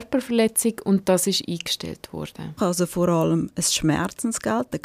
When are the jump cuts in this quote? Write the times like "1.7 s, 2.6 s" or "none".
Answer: 2.6 s